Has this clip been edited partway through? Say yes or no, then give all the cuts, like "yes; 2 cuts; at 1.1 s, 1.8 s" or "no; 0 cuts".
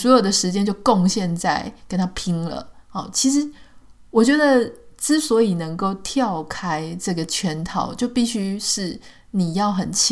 no; 0 cuts